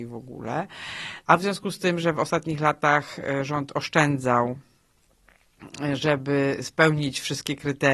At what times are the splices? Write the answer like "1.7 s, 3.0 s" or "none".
1.2 s